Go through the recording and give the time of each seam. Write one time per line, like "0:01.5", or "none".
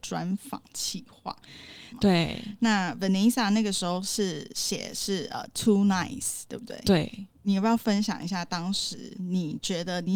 0:01.9